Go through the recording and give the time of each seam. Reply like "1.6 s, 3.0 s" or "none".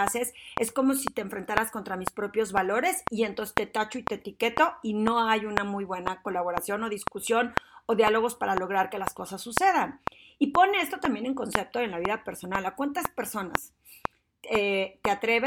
none